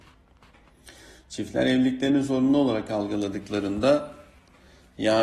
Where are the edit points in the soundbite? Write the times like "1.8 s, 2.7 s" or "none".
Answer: none